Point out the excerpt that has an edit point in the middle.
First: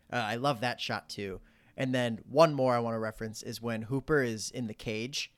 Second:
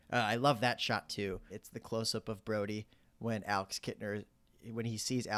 second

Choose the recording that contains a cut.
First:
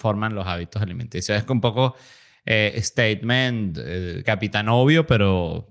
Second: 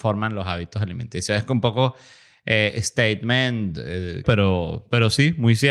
second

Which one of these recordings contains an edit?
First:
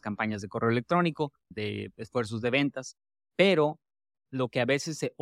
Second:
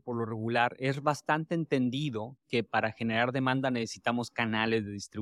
first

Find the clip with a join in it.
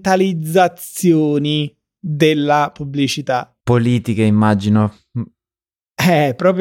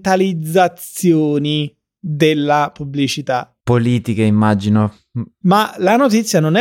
second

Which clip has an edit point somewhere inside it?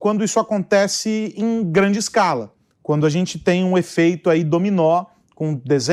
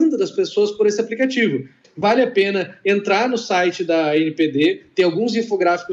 second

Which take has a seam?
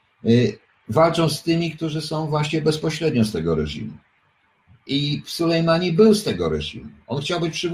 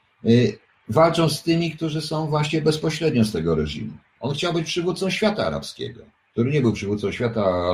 second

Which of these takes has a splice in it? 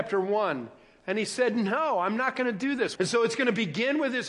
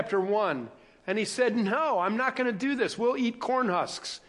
first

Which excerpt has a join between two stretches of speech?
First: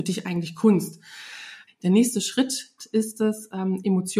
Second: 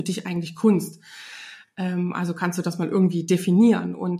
first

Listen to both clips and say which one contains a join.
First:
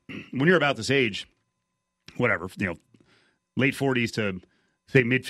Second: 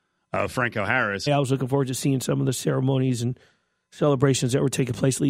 second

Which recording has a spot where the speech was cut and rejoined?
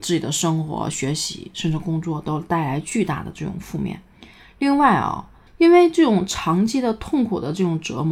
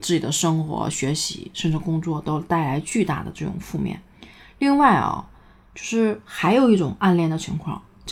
first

